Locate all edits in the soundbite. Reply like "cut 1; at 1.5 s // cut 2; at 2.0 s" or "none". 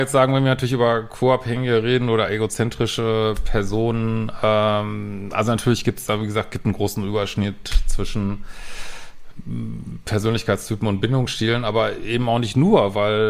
none